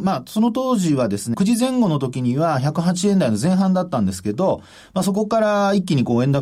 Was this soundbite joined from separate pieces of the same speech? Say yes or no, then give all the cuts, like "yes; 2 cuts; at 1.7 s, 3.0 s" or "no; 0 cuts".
yes; 1 cut; at 1.3 s